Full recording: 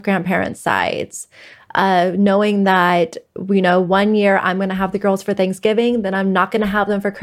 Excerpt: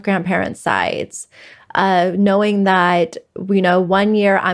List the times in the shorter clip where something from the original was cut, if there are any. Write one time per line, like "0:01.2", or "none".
none